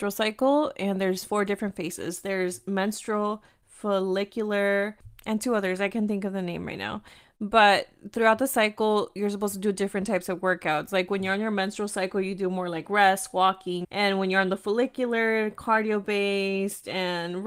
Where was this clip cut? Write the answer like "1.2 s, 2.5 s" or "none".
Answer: 13.8 s

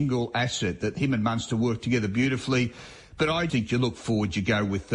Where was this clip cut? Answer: 3.5 s

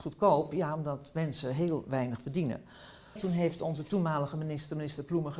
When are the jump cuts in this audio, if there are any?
3.2 s

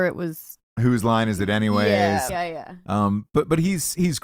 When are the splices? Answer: 2.3 s

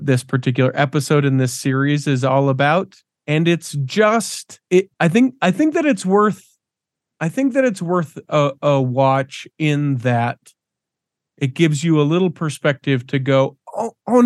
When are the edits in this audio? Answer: none

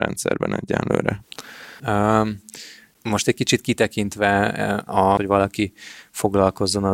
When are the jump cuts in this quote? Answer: 1.8 s, 5.2 s

